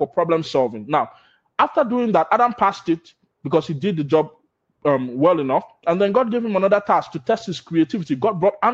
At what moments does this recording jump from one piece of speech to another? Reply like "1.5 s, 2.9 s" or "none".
none

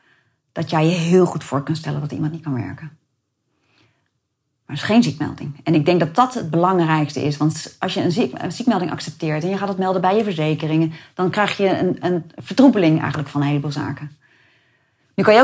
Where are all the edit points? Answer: none

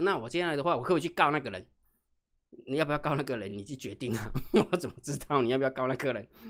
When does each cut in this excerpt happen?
none

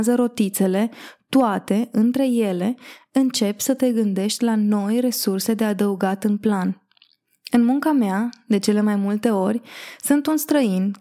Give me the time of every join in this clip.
none

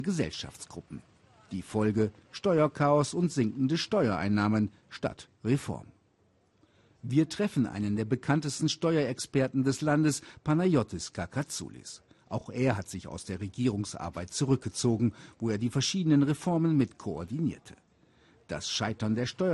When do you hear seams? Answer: none

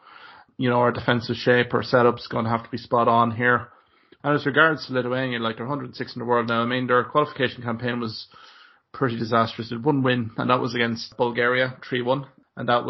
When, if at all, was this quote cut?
4.2 s

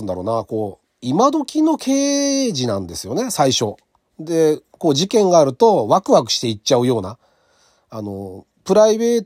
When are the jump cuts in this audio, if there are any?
none

